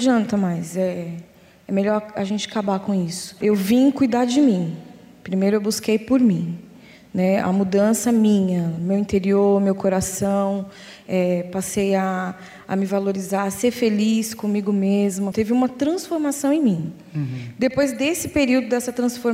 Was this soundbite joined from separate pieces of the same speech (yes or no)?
no